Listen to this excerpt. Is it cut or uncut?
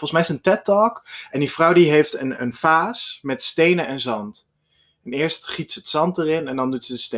uncut